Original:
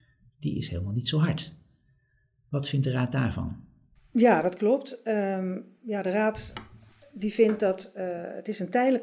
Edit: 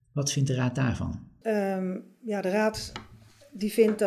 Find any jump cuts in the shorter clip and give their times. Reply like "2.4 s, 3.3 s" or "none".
1.4 s